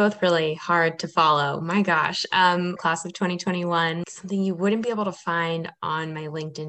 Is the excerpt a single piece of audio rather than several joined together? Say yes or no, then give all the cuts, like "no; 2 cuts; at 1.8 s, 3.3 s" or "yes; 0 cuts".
no; 2 cuts; at 2.8 s, 4.0 s